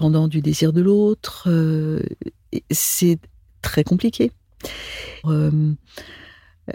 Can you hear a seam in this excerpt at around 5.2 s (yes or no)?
yes